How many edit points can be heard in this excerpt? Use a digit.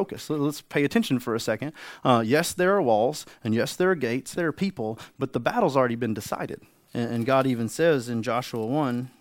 2